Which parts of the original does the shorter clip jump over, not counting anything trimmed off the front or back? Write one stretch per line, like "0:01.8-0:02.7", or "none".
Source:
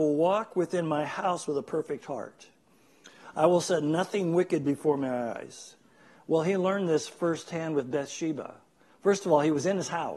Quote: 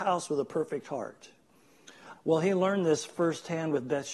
0:03.3-0:06.2